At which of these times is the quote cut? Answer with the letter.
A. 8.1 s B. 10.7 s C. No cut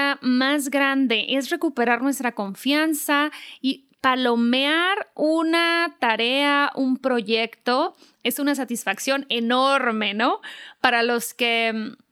C